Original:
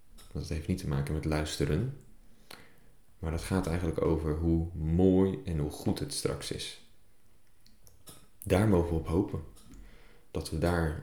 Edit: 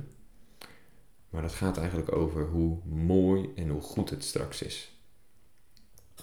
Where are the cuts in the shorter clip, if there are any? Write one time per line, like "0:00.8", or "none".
none